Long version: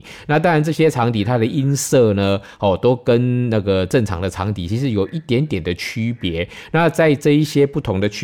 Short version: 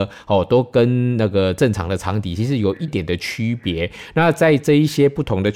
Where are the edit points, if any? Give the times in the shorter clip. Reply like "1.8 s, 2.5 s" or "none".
2.9 s